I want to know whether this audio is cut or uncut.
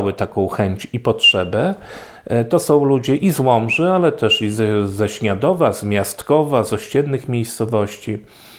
uncut